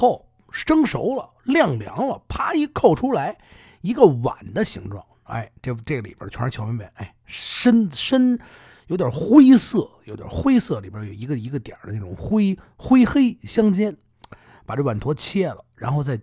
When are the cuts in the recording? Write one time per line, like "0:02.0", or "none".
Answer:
none